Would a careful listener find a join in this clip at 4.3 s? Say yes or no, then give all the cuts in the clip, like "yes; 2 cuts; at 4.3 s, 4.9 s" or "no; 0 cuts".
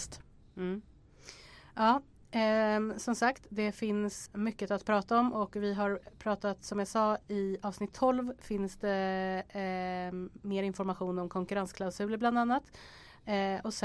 yes; 1 cut; at 4.3 s